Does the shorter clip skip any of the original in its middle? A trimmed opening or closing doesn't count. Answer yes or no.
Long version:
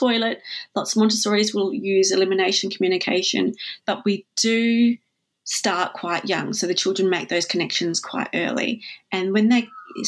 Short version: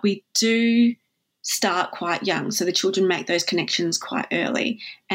no